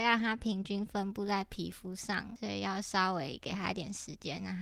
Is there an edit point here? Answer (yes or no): no